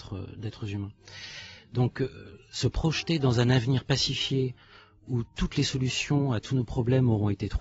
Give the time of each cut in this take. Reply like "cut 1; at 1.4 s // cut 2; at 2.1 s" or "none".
none